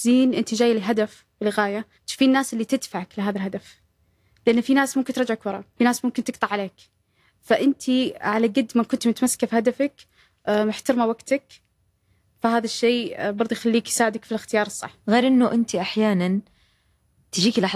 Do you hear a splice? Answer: yes; 3 cuts; at 1.9 s, 5.7 s, 15.0 s

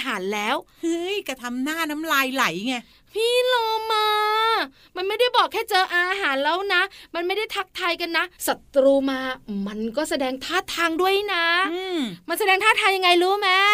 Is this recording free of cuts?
no; 1 cut; at 8.4 s

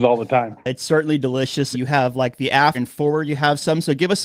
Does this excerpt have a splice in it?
yes; 2 cuts; at 1.7 s, 2.7 s

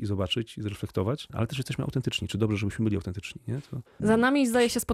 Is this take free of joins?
yes; 0 cuts

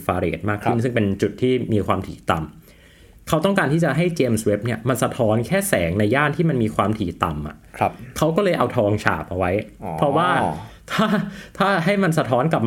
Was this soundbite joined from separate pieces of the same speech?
no; 0 cuts

